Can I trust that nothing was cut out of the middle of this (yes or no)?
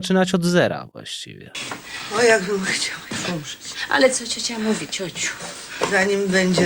yes